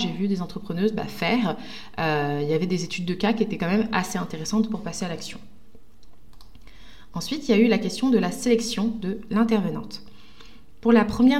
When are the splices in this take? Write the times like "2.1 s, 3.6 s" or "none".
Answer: none